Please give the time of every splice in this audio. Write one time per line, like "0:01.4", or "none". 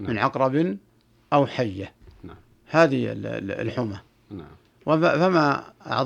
0:04.8